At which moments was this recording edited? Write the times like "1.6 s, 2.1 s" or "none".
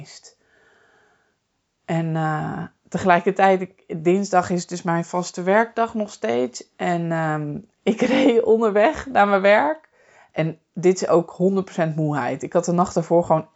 none